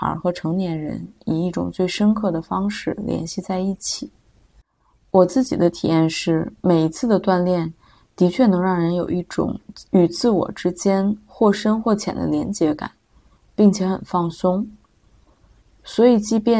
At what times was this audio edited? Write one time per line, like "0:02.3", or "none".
none